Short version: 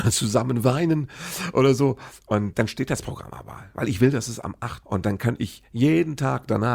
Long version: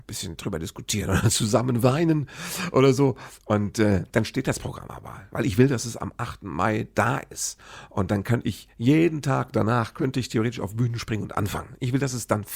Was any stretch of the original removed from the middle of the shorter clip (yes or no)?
yes